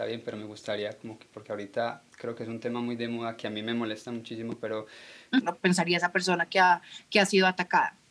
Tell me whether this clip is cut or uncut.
cut